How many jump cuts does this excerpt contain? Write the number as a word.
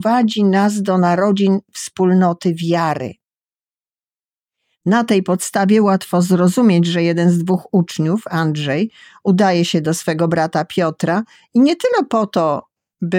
zero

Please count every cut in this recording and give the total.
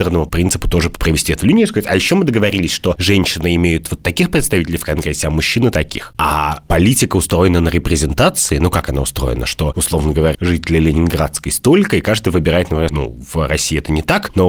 three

